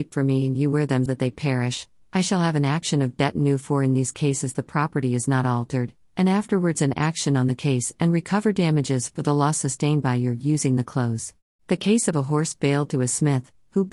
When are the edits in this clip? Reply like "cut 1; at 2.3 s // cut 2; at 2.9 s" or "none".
cut 1; at 1.1 s // cut 2; at 11.6 s